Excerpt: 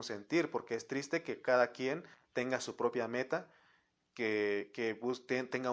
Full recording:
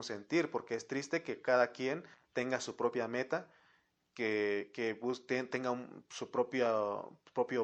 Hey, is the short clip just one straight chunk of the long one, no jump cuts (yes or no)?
yes